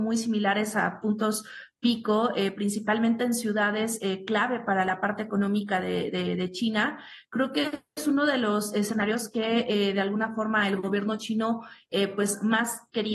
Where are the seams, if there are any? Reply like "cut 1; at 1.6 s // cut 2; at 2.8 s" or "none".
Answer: none